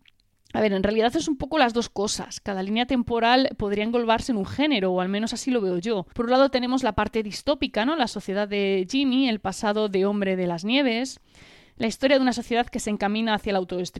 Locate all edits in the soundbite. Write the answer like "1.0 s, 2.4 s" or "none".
6.1 s

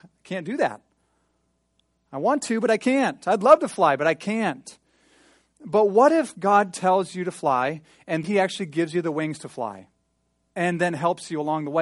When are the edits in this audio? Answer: 8.2 s

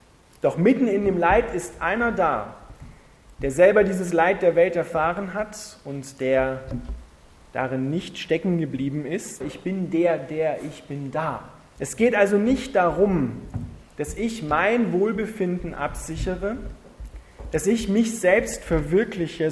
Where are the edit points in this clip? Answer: 9.4 s, 11.8 s

